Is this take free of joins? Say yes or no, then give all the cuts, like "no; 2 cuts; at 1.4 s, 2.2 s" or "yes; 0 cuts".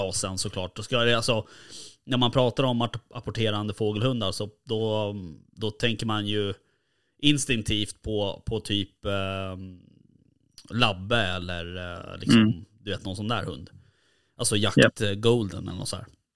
yes; 0 cuts